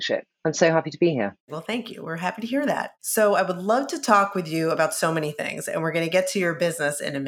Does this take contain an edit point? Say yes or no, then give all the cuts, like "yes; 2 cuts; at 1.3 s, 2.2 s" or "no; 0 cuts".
no; 0 cuts